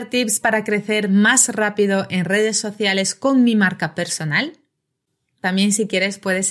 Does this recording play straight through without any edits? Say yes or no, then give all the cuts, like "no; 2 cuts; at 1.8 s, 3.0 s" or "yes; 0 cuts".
no; 1 cut; at 5.4 s